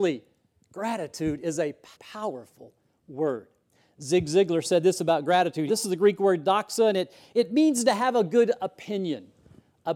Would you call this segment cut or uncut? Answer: cut